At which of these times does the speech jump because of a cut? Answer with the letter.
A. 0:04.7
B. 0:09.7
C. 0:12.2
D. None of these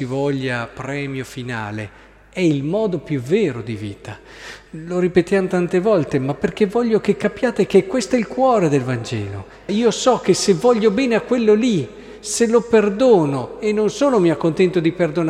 B